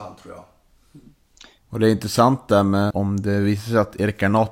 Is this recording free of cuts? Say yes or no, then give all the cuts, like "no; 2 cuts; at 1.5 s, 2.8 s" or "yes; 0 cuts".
no; 2 cuts; at 1.6 s, 2.9 s